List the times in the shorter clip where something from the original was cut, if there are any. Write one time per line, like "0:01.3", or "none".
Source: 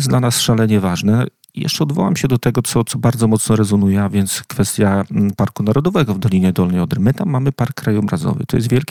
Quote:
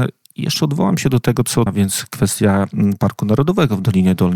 0:01.7